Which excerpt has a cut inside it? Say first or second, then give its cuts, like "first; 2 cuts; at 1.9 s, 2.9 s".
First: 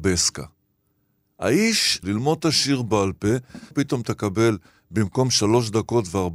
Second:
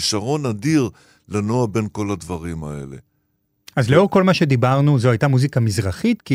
first; 2 cuts; at 2.0 s, 3.7 s